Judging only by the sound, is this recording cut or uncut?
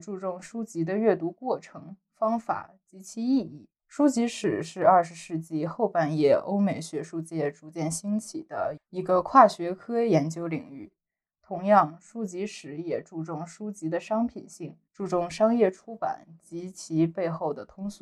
cut